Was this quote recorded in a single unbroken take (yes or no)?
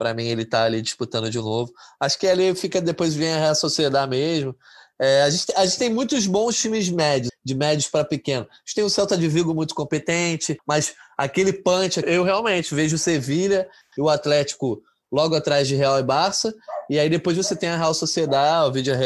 no